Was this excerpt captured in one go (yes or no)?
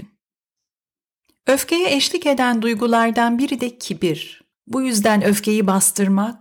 no